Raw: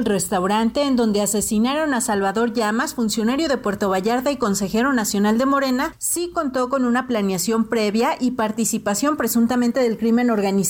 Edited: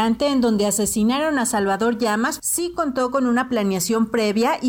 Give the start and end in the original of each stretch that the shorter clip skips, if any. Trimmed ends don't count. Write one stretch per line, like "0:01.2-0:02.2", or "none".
0:02.9-0:06.0